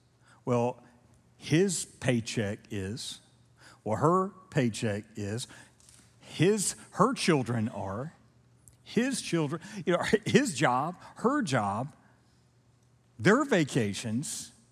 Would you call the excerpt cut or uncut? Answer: uncut